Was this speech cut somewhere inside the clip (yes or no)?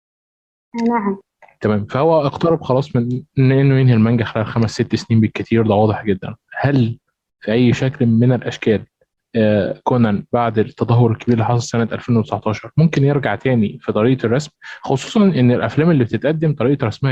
no